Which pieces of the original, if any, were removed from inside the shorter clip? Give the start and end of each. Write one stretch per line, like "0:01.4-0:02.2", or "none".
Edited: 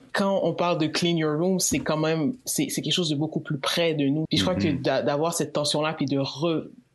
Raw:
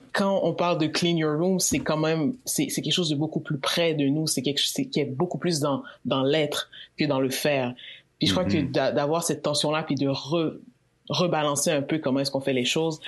0:04.3-0:08.1